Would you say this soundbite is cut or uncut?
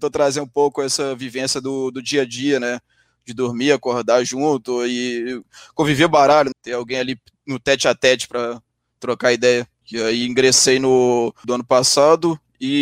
cut